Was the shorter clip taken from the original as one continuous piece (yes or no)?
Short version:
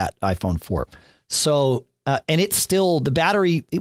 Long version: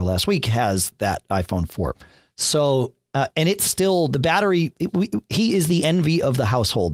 yes